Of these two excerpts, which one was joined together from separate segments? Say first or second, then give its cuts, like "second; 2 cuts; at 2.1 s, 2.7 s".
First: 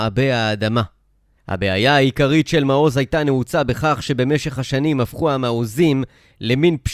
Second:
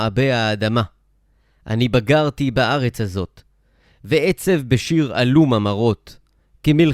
first; 1 cut; at 1.4 s